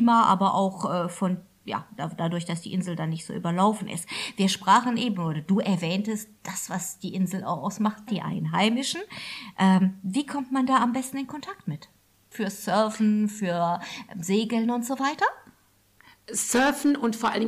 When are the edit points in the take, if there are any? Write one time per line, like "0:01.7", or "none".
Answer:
0:08.1
0:12.3